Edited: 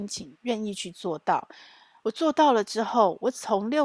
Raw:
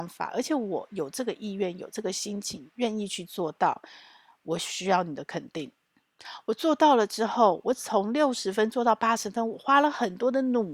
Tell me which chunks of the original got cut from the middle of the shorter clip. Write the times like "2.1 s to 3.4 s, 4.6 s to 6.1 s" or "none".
4.3 s to 6.4 s